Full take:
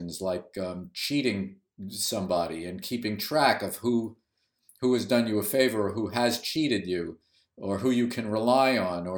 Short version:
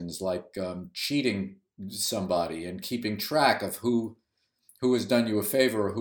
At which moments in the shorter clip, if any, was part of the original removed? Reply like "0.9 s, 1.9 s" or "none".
none